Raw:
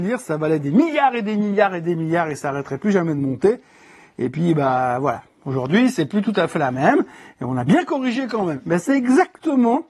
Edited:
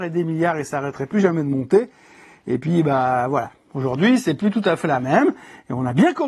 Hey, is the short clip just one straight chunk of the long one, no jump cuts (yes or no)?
yes